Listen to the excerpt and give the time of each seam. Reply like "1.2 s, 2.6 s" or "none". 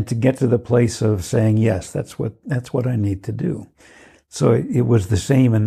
none